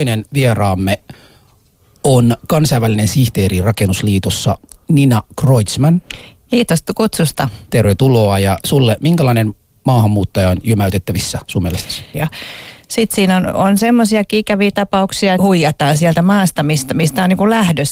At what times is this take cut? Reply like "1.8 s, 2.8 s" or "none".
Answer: 7.6 s, 12.1 s, 15.4 s

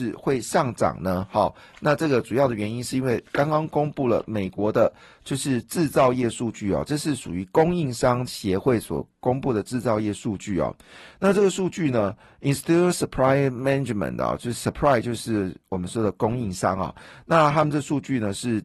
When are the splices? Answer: none

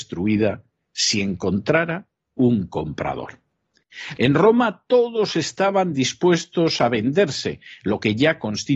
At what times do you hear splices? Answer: 4.2 s

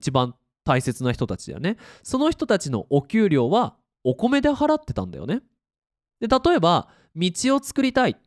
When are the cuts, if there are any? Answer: none

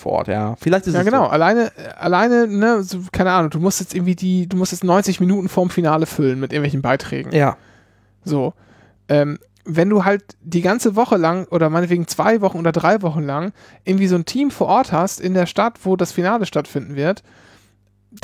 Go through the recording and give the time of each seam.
none

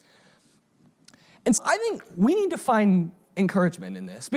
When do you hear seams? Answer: 1.6 s

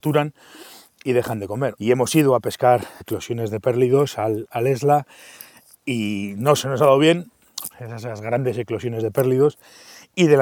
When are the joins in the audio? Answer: 1.8 s, 3.0 s, 7.7 s

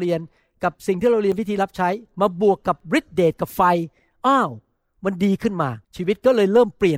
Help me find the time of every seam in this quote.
5.8 s

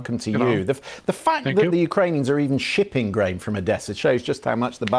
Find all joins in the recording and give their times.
none

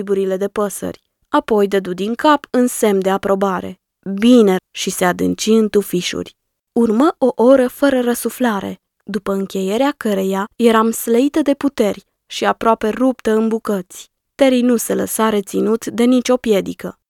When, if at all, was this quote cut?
4.6 s

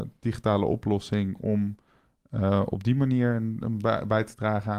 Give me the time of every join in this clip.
none

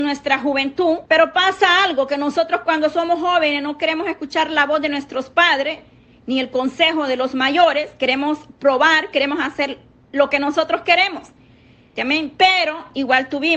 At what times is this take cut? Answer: 1.1 s, 12.0 s

